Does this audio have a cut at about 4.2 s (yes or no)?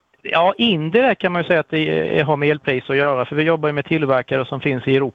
no